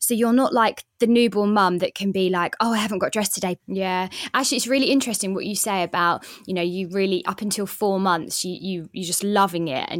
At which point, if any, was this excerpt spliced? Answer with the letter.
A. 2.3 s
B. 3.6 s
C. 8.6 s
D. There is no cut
B